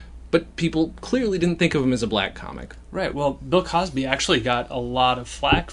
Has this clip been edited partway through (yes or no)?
no